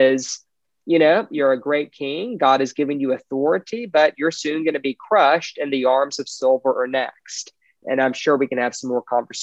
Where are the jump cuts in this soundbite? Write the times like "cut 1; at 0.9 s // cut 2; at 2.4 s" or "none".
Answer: cut 1; at 7.8 s